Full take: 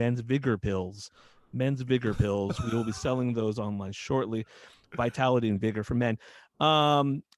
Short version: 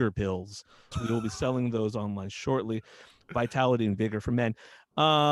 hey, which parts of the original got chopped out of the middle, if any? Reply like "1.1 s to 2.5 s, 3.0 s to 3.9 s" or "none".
1.4 s to 2.5 s